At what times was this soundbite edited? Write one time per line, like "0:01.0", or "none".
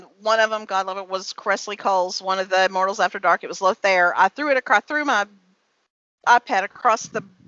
none